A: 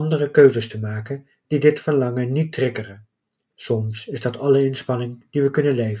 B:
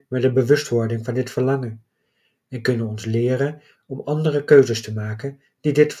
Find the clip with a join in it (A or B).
A